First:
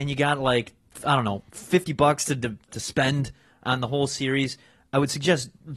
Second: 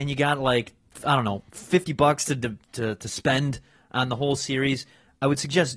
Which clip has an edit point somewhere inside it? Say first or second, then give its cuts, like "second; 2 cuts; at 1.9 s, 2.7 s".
first; 1 cut; at 2.7 s